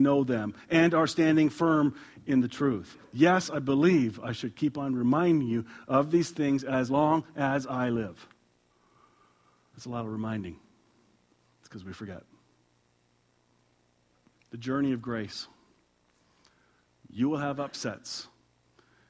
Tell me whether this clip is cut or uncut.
uncut